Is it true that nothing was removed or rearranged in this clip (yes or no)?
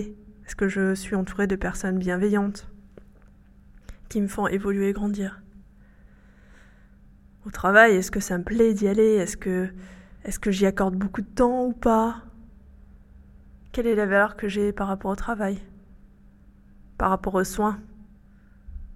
no